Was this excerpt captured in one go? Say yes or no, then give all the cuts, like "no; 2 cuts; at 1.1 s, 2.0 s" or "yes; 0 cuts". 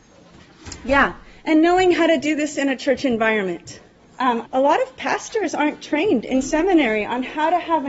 no; 1 cut; at 4.4 s